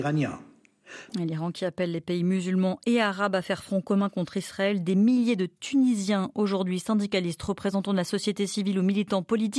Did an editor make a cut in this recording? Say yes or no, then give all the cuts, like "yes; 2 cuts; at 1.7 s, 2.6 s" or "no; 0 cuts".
yes; 1 cut; at 1.1 s